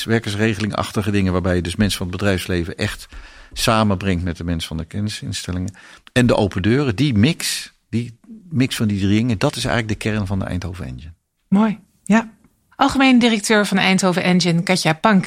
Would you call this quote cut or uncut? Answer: uncut